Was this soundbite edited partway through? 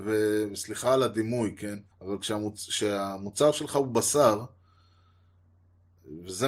yes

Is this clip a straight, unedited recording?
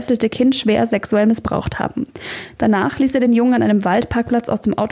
yes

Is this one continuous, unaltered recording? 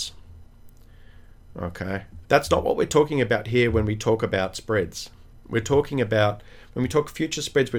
no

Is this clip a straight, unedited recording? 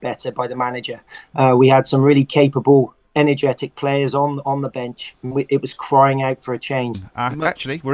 no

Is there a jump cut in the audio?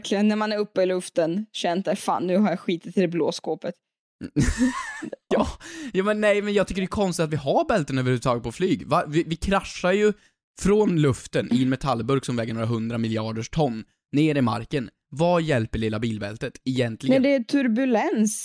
yes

